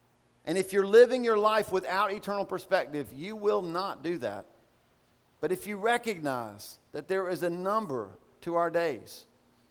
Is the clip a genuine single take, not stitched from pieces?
yes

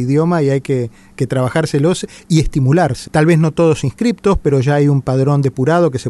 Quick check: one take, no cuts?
no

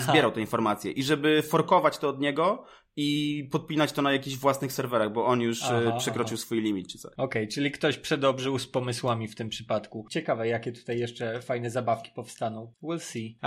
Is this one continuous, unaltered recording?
no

